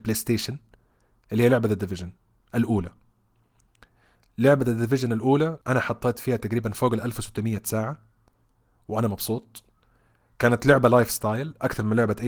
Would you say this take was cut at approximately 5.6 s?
yes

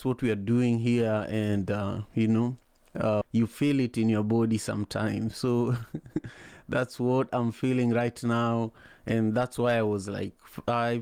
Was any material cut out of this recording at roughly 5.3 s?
no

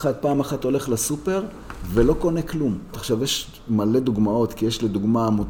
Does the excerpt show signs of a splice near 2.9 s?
yes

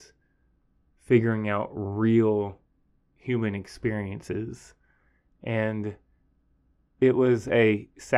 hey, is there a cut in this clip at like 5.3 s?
no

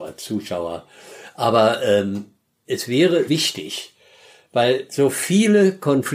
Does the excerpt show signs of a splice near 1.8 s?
no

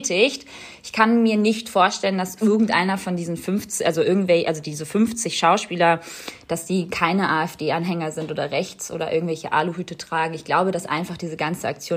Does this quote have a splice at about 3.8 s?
no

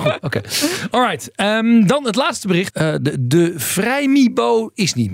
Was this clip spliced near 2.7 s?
yes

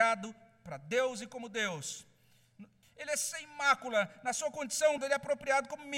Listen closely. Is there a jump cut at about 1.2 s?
no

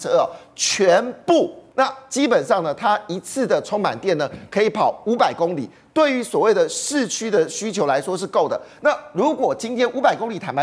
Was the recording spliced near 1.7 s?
yes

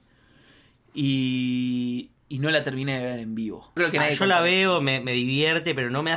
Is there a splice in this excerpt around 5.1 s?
no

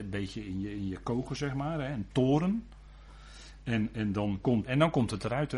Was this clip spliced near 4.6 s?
yes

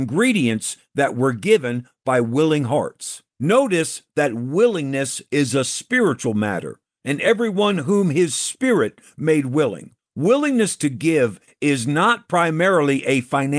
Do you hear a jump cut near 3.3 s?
yes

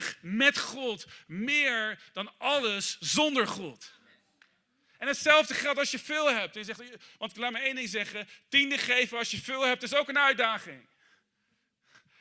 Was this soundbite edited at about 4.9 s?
no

